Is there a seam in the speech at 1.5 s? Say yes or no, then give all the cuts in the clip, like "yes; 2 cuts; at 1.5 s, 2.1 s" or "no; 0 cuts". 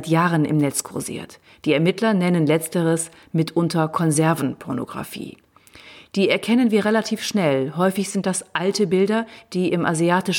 no; 0 cuts